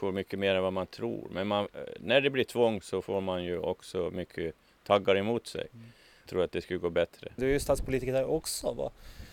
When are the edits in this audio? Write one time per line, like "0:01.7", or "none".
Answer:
0:06.3
0:07.4